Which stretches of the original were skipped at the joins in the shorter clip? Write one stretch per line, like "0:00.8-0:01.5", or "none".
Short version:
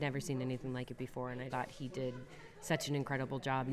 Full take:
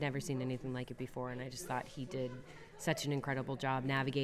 0:01.5-0:01.7